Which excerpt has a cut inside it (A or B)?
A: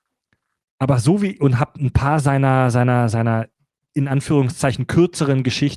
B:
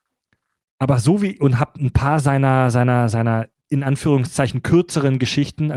B